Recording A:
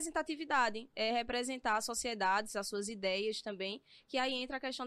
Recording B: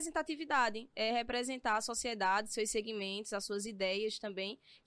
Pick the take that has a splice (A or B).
A